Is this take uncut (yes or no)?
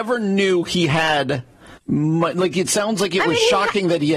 no